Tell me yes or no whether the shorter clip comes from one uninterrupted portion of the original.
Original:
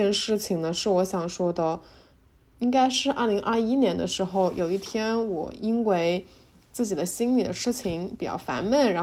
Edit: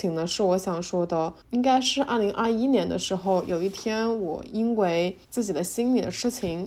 no